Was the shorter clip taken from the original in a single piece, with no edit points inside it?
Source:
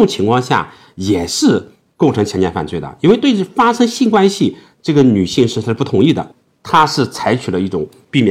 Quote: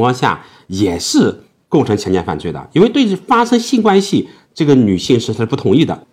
yes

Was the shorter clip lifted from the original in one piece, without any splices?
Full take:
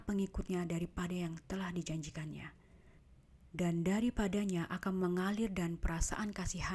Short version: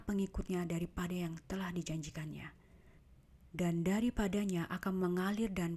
yes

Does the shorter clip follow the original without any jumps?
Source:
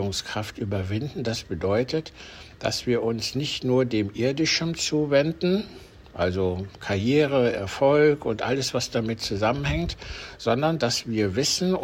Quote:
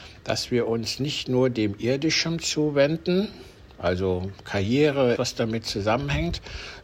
no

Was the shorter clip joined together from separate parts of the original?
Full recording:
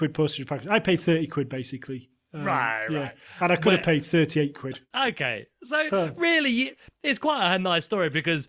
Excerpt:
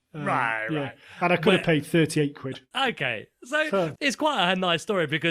yes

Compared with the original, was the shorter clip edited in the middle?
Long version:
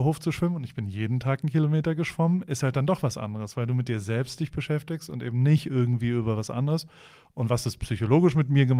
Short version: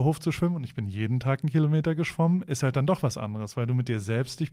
no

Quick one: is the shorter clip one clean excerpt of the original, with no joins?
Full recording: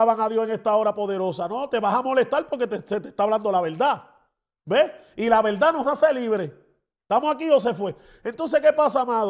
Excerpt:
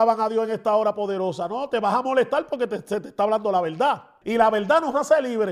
no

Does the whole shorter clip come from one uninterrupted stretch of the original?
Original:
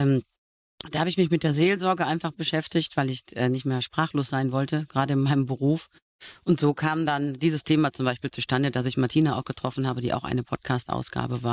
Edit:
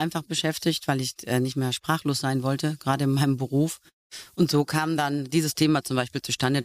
yes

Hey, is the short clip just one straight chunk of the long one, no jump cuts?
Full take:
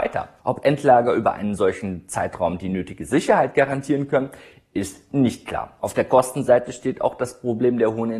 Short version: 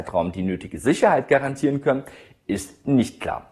yes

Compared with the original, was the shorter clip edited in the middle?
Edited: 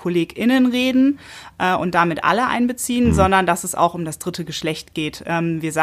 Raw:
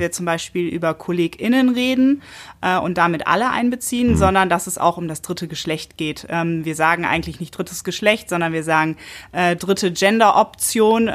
no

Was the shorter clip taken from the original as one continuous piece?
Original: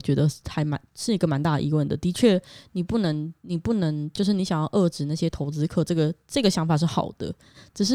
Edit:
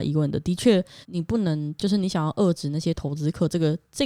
no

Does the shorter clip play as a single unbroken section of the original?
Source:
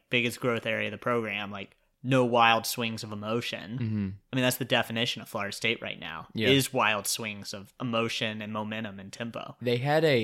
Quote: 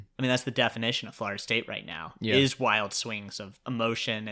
yes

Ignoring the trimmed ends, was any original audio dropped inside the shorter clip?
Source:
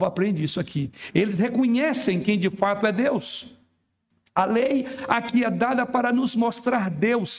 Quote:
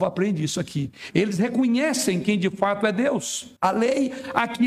yes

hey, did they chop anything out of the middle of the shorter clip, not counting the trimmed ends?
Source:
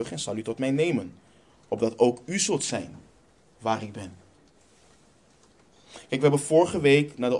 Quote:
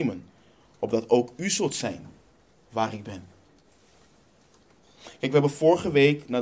no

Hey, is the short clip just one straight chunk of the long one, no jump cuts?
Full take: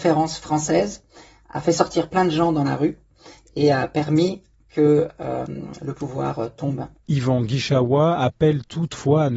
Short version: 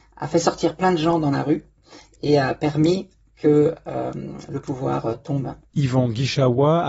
yes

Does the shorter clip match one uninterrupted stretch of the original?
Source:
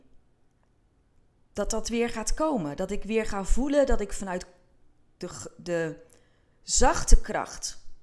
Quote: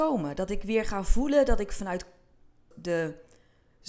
no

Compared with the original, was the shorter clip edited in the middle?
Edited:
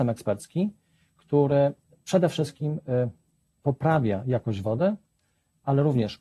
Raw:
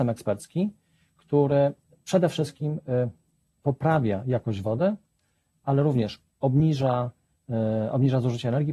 no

